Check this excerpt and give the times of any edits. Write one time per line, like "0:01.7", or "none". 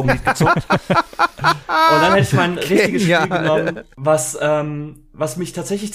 none